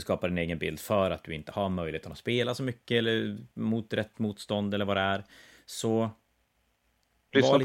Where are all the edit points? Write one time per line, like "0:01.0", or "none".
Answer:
none